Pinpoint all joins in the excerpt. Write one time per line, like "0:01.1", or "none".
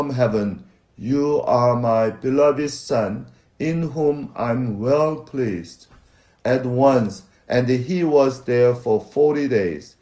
0:07.3